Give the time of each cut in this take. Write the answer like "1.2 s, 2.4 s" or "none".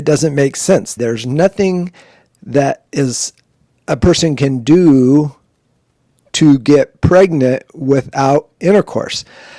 1.0 s